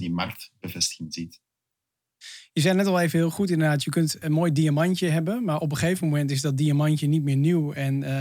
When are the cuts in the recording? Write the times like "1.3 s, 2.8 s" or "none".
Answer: 4.2 s